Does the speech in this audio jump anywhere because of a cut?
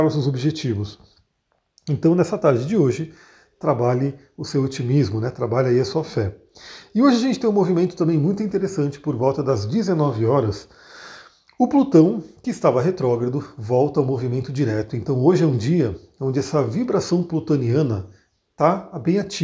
no; 0 cuts

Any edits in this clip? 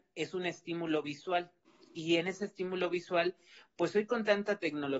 no; 0 cuts

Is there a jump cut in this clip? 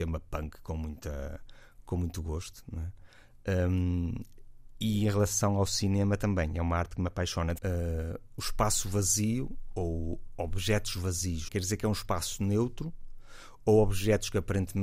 yes; 2 cuts; at 7.6 s, 11.5 s

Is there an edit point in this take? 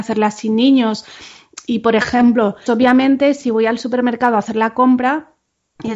yes; 1 cut; at 2.7 s

